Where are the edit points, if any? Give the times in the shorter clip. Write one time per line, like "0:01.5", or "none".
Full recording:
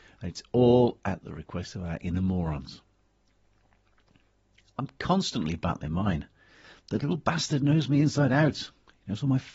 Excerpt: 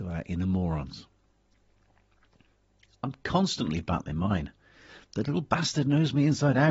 none